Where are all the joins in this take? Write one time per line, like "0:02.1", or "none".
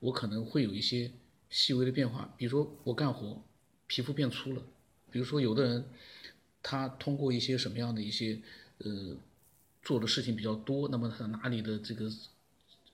0:05.1